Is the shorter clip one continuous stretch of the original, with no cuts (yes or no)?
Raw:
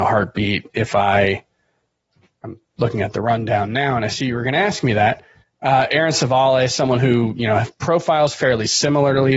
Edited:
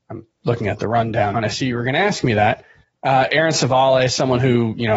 no